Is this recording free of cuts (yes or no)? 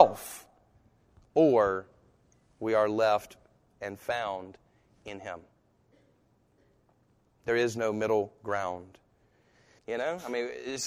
no